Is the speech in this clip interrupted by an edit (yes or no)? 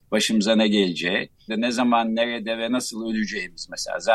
yes